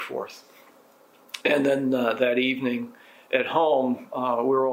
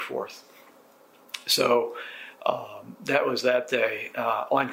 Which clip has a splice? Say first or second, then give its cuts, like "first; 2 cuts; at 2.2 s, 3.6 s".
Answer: first; 1 cut; at 1.4 s